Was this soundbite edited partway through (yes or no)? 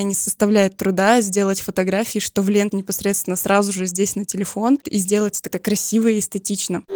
yes